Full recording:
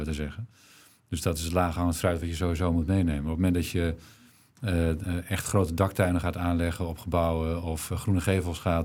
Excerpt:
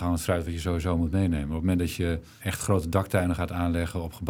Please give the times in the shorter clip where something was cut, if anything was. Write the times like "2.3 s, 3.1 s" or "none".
2.4 s